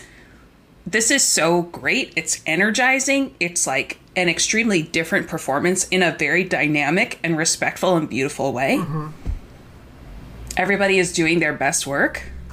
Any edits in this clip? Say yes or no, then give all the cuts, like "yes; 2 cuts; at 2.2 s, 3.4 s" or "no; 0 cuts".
no; 0 cuts